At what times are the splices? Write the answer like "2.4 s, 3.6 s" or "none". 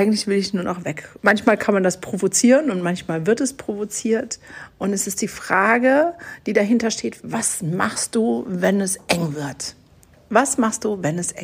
1.2 s